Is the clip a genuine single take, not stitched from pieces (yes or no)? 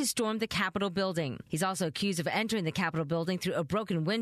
yes